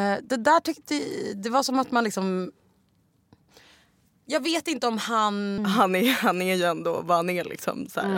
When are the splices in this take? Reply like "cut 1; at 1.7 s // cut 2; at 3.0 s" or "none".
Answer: cut 1; at 5.6 s